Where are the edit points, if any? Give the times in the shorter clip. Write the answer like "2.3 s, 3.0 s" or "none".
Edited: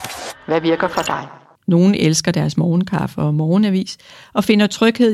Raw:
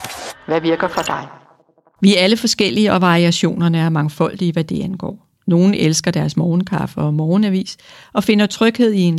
1.5 s